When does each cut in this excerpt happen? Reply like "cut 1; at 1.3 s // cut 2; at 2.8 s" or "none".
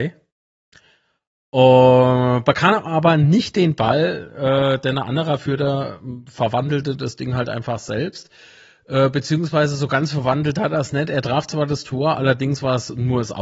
none